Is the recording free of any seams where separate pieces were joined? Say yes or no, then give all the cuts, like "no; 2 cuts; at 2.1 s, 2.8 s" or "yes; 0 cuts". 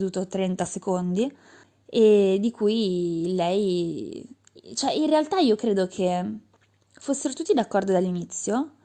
yes; 0 cuts